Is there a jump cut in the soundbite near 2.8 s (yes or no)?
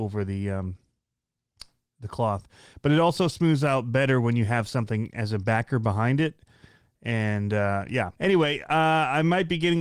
no